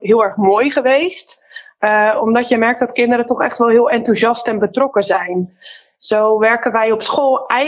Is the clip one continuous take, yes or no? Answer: yes